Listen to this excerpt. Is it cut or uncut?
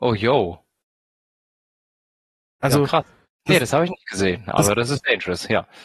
uncut